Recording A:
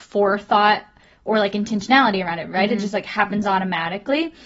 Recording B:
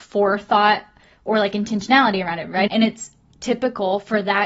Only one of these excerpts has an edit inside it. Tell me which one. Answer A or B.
B